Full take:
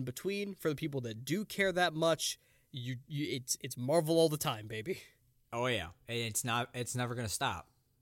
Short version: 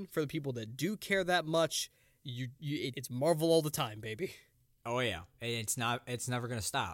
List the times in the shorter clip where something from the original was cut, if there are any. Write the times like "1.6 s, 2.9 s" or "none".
2.9 s